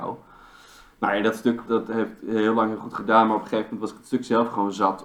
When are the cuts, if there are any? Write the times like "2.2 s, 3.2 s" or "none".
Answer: 1.7 s

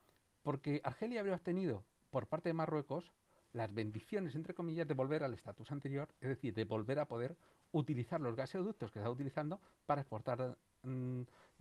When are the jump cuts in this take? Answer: none

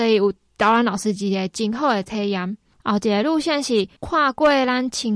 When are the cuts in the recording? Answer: 4.0 s

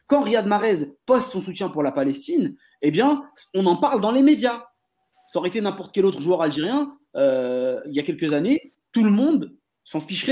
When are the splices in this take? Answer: none

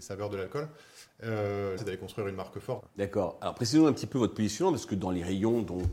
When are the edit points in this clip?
1.8 s, 2.8 s

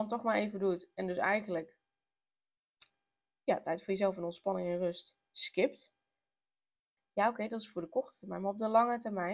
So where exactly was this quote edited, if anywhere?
7.0 s

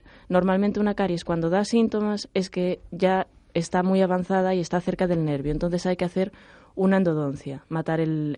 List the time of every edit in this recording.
none

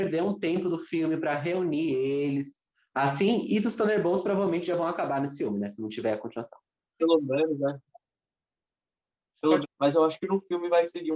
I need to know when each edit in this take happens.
7.0 s, 9.6 s

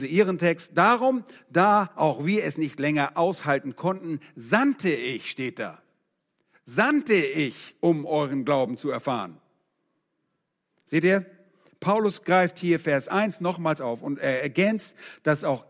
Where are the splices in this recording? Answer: none

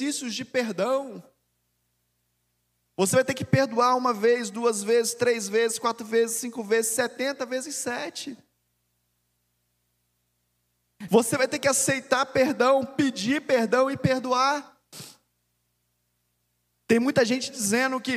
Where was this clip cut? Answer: 11.1 s

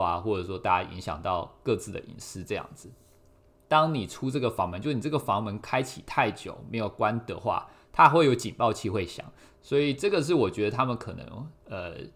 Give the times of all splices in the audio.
3.6 s, 9.5 s

